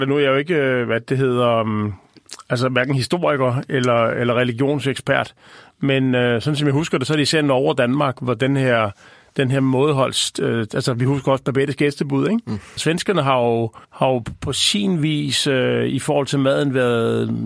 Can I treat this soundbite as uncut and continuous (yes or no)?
no